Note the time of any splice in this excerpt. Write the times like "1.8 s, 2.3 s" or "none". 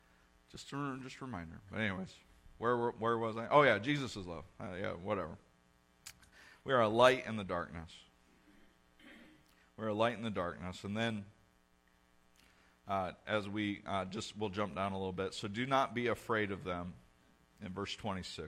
none